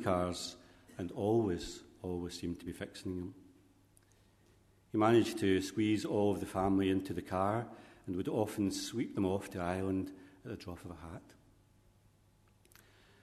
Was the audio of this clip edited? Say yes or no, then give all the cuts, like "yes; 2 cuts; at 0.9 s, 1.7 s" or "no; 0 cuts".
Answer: no; 0 cuts